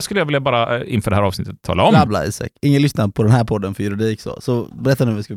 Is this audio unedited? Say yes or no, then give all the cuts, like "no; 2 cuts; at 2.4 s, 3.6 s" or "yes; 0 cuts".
no; 1 cut; at 2.1 s